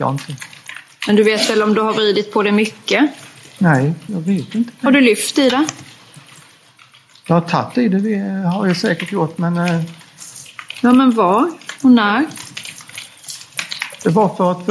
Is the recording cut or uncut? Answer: cut